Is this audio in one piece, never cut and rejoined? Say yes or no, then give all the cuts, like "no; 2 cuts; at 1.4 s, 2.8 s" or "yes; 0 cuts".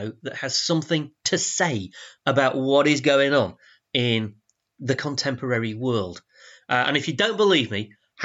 yes; 0 cuts